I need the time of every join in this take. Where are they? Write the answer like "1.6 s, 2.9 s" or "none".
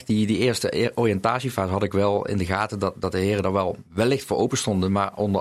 none